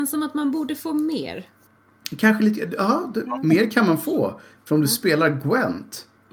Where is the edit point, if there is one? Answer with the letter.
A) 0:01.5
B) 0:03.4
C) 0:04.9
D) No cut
B